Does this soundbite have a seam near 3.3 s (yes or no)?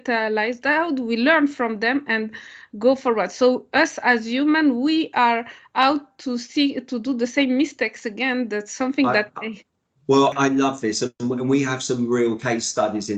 no